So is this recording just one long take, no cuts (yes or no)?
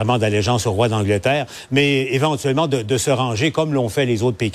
yes